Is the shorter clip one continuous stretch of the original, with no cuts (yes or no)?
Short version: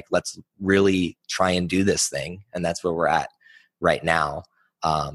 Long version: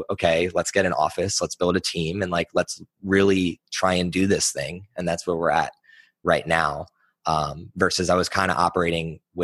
yes